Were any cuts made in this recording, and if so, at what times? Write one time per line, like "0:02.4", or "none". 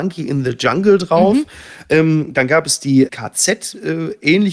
none